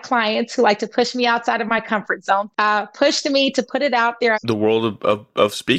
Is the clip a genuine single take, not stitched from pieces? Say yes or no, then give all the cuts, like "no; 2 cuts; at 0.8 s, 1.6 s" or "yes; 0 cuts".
no; 2 cuts; at 2.5 s, 4.3 s